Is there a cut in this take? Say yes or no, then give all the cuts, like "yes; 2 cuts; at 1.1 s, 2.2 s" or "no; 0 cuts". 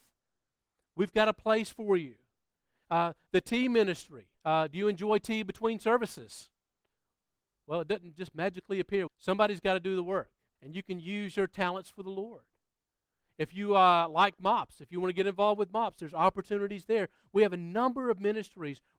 yes; 3 cuts; at 4.3 s, 9.1 s, 10.6 s